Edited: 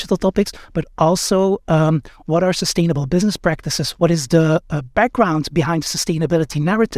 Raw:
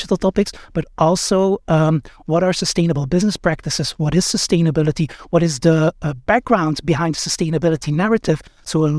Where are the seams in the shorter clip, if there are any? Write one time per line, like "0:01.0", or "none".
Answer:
0:04.0